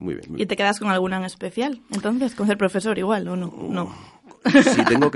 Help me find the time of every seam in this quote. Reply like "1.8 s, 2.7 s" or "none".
none